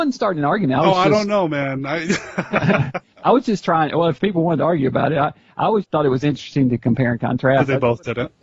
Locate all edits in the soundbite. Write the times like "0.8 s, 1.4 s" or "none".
5.8 s